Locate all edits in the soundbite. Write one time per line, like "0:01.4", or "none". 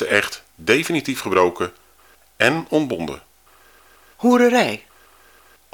none